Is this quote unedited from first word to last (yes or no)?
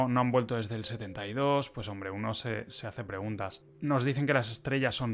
yes